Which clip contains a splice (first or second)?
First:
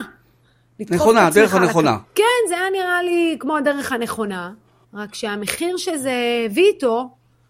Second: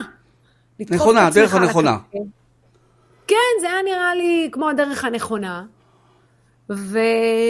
first